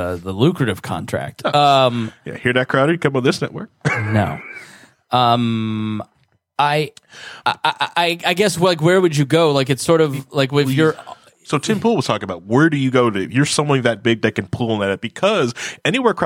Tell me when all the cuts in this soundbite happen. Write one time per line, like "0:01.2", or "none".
none